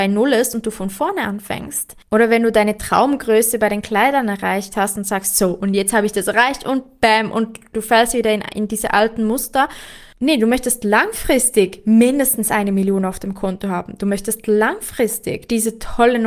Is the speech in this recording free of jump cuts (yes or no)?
yes